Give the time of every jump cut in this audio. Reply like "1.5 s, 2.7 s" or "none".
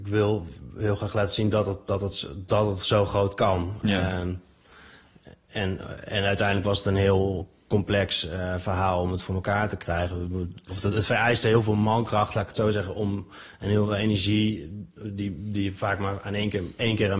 none